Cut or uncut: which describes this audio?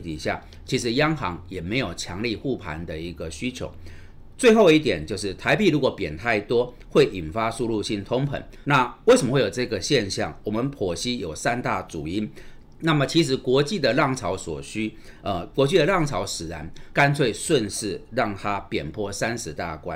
cut